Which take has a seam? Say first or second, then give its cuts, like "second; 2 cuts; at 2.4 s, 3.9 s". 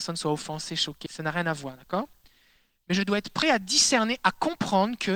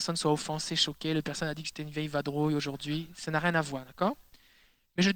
first; 1 cut; at 1.1 s